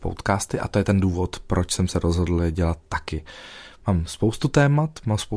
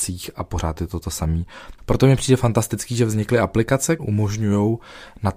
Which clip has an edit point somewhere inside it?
second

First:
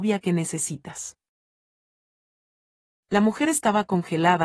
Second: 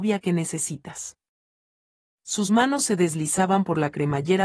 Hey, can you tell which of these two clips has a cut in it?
second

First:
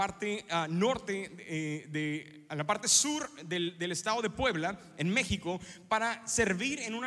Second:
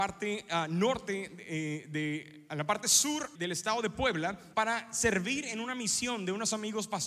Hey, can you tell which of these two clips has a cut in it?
second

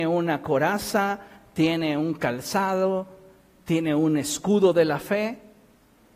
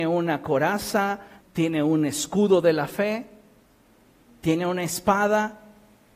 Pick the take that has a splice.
second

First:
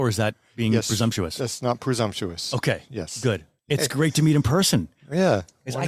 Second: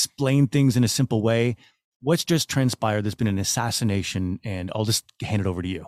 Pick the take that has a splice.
first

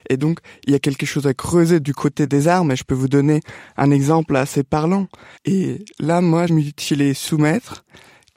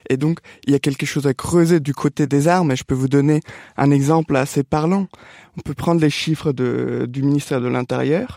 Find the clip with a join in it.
first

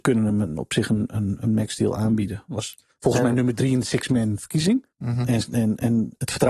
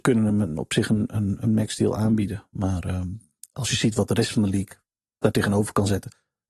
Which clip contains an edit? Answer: first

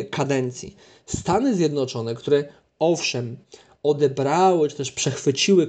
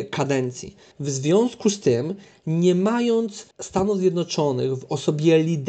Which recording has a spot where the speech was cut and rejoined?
second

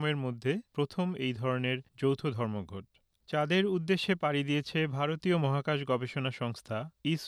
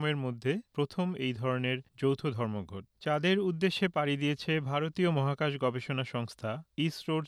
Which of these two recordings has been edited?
second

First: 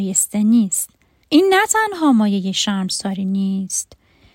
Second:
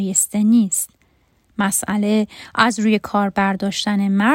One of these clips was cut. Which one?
first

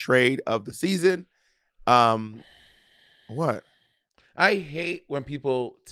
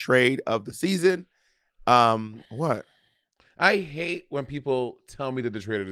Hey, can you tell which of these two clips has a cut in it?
second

